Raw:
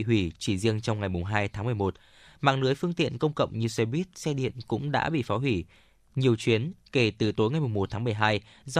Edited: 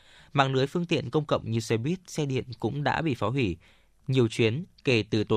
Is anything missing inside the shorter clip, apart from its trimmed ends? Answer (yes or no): no